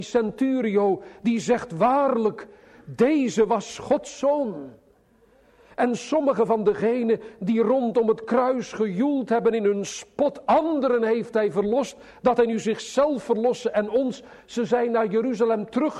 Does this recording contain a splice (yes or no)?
no